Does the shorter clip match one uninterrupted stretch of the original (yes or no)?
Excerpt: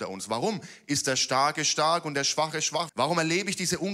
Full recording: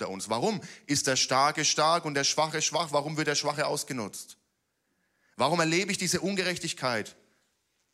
no